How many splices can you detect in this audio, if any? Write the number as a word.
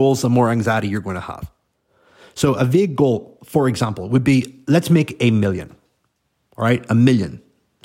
zero